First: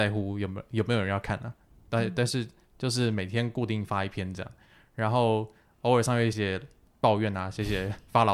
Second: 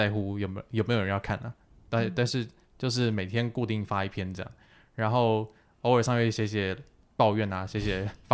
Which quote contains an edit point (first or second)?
first